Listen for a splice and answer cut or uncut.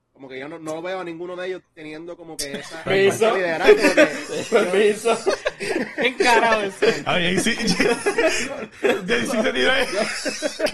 cut